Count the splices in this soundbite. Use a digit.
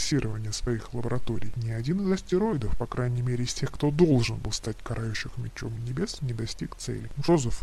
0